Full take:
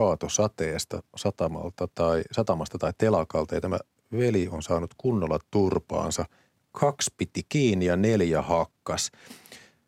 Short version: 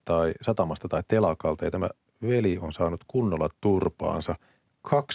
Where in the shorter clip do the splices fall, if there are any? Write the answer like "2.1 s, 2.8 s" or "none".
none